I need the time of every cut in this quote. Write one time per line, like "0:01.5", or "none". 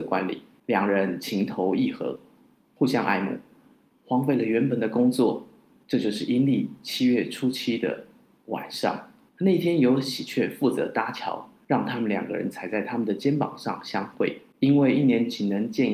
0:05.8